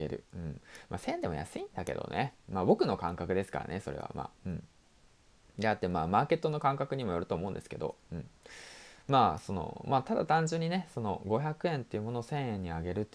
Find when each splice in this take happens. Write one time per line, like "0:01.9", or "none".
none